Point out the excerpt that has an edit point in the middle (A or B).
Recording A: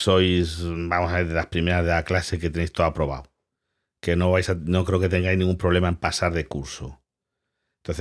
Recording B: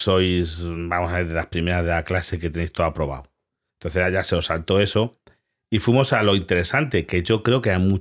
B